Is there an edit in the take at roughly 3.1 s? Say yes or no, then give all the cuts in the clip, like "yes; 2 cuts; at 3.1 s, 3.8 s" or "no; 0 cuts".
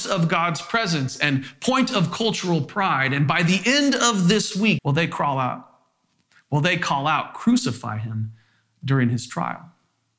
no; 1 cut; at 4.8 s